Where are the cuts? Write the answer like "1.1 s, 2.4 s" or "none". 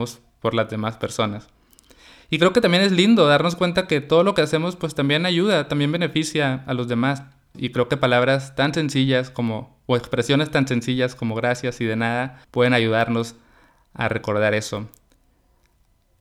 7.5 s, 12.4 s